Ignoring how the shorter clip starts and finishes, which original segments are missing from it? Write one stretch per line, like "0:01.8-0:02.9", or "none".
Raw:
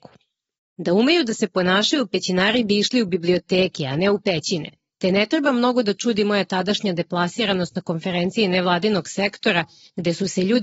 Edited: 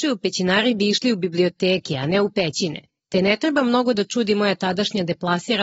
none

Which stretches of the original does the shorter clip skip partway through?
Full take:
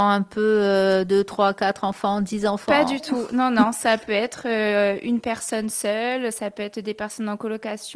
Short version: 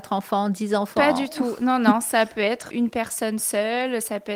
0:04.4-0:05.0

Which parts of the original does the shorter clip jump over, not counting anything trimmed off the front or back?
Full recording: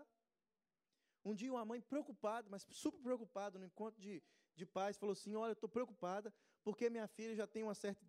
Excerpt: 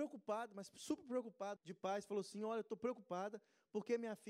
0:03.5-0:04.5

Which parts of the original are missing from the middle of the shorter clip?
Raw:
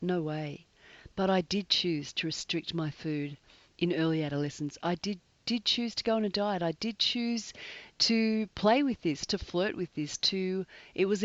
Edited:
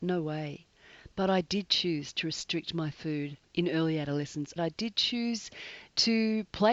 0:03.4-0:03.7
0:04.8-0:06.6

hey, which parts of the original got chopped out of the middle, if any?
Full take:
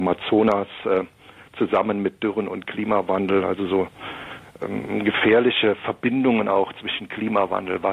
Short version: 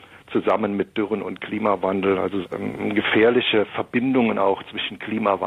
0:03.7-0:04.5

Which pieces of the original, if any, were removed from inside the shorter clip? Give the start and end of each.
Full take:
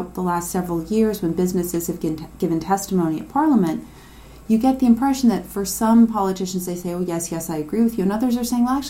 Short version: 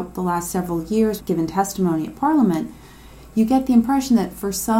0:01.2-0:02.3

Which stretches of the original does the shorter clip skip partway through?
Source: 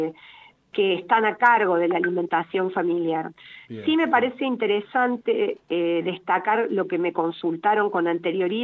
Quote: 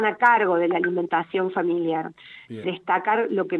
0:03.8-0:06.0

